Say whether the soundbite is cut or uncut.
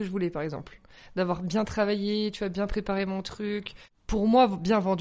uncut